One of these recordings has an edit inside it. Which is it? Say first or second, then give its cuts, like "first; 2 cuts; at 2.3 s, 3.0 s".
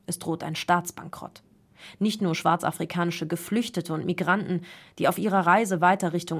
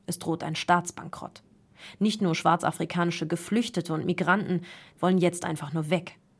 second; 1 cut; at 4.9 s